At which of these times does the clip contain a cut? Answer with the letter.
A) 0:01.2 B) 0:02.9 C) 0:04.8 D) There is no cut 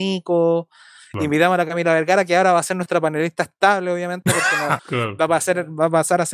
C